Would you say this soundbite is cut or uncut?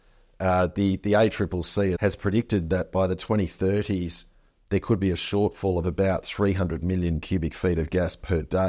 cut